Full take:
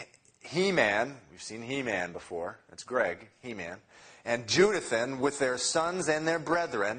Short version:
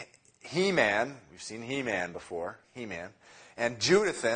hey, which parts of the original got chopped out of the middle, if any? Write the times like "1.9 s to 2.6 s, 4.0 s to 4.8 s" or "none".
2.6 s to 3.3 s